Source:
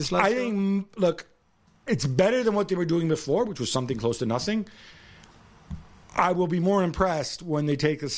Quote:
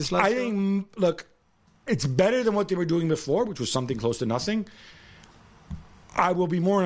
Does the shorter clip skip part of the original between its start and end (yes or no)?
no